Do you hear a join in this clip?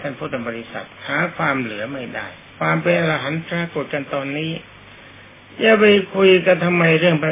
no; 0 cuts

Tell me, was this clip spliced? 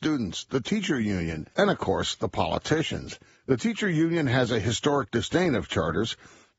yes; 2 cuts; at 1.5 s, 3.4 s

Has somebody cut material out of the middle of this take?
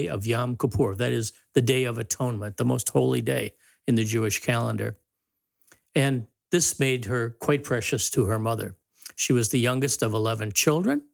no; 0 cuts

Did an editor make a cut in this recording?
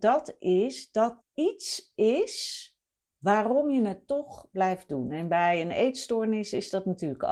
yes; 1 cut; at 1.2 s

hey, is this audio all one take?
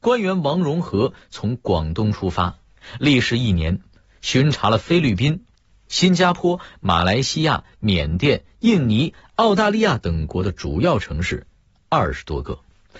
yes; 0 cuts

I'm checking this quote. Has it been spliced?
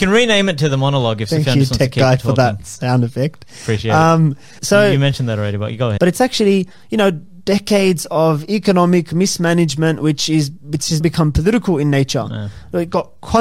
yes; 3 cuts; at 4.6 s, 6.0 s, 11.0 s

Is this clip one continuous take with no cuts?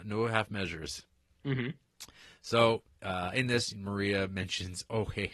yes; 0 cuts

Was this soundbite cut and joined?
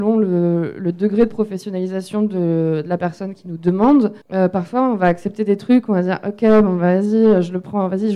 yes; 1 cut; at 4.2 s

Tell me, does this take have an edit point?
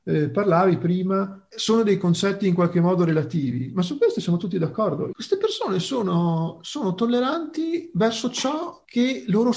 yes; 1 cut; at 5.1 s

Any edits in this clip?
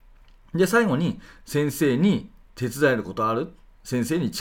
no; 0 cuts

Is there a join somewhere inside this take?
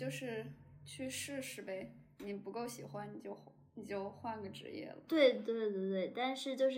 yes; 1 cut; at 5.1 s

